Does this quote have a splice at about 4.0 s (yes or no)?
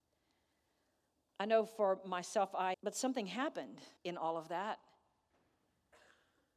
yes